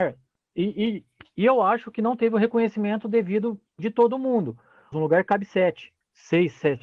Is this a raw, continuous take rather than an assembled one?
no; 1 cut; at 4.9 s

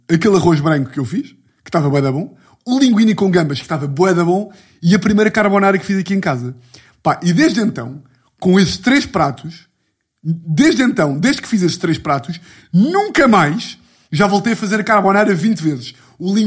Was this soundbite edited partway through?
no; 0 cuts

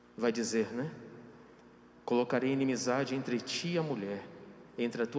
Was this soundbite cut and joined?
no; 0 cuts

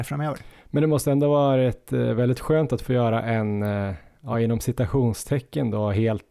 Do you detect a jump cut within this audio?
no; 0 cuts

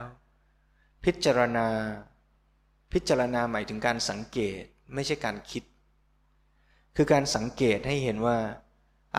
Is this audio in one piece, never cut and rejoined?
yes; 0 cuts

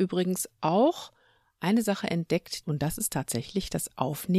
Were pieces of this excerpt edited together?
yes; 1 cut; at 2.6 s

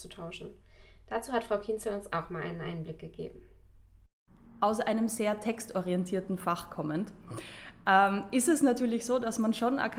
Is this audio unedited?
yes; 0 cuts

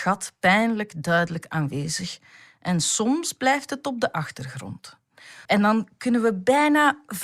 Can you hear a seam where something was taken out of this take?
yes; 1 cut; at 5.5 s

